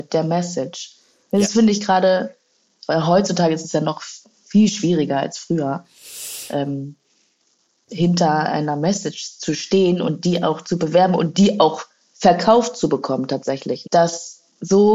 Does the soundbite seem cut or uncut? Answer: cut